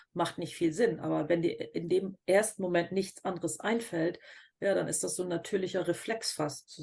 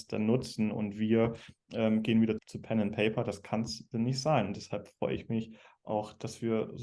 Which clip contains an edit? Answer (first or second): second